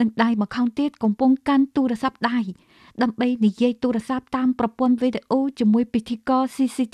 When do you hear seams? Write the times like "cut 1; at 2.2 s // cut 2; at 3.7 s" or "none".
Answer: none